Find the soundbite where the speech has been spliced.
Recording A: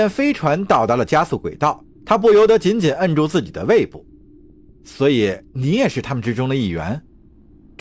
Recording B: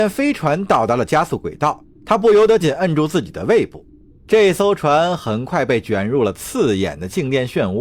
B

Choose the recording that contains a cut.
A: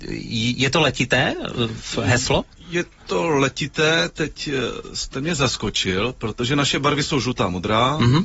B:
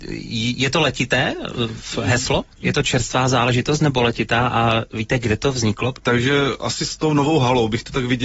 B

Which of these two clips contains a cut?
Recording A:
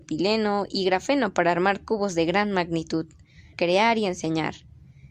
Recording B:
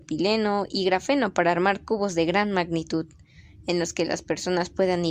A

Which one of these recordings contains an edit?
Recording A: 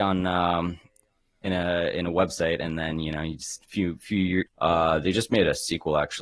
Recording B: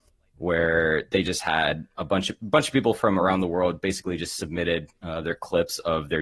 A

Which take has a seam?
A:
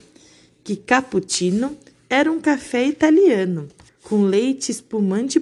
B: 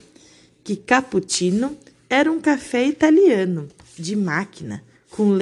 A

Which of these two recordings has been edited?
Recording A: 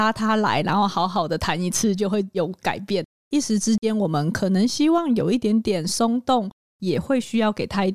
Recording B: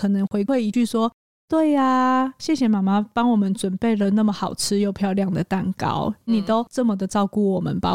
A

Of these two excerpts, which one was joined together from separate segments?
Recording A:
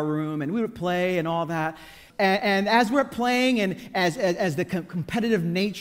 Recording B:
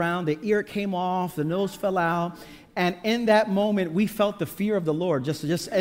A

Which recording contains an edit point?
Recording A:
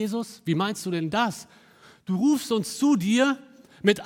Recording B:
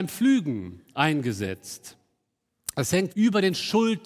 B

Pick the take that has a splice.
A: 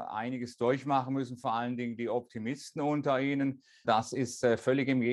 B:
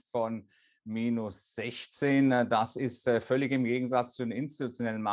A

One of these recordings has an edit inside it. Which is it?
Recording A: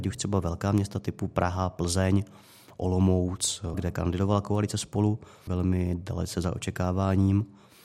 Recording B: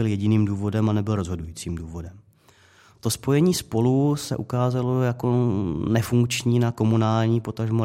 A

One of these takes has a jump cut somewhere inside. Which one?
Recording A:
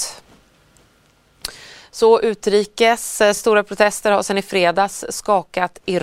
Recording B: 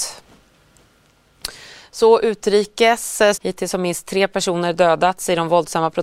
B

